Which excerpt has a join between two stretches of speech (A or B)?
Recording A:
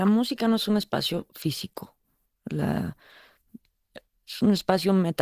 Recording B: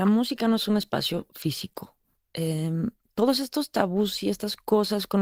B